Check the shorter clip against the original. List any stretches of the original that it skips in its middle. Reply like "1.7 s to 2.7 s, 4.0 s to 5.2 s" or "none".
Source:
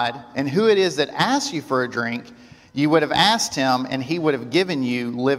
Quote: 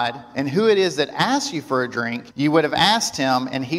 2.3 s to 2.7 s